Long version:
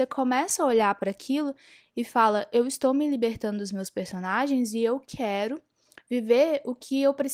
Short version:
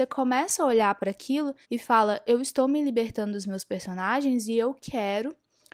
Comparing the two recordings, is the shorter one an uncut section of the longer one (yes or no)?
no